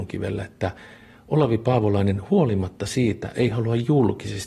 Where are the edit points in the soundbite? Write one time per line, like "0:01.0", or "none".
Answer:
0:03.3